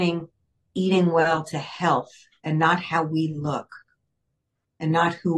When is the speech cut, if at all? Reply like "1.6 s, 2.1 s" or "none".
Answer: none